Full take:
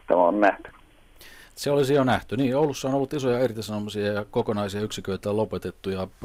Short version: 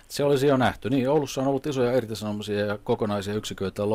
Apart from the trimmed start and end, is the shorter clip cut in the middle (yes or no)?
no